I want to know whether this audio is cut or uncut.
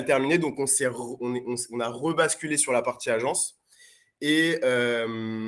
uncut